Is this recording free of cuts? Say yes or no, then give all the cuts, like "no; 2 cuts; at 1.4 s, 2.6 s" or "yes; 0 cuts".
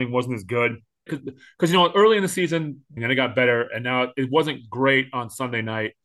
no; 2 cuts; at 1.1 s, 3.0 s